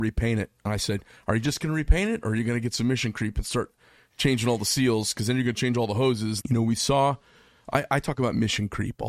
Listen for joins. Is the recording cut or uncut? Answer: cut